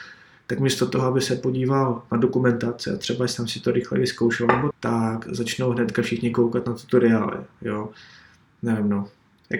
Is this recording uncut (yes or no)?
no